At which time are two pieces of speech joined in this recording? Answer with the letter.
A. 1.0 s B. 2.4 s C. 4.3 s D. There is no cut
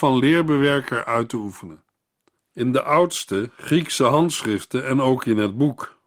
B